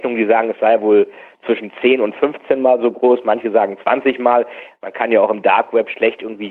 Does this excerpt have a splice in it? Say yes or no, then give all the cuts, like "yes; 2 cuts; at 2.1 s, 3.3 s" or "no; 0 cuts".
yes; 1 cut; at 4.7 s